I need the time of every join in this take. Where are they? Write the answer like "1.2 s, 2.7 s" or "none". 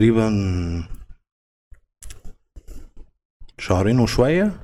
3.5 s